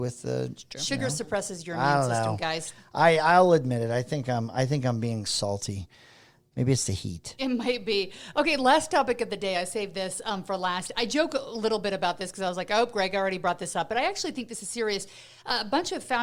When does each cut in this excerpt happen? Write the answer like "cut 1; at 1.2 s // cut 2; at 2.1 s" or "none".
none